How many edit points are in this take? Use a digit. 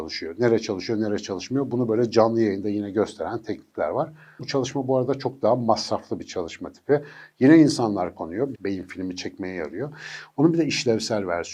2